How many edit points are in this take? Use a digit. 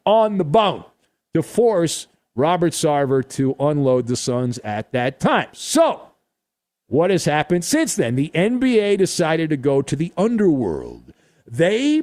0